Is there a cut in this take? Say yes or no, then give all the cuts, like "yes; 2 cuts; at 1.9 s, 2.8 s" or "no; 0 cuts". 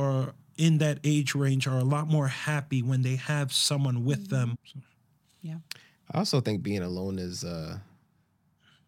yes; 1 cut; at 4.5 s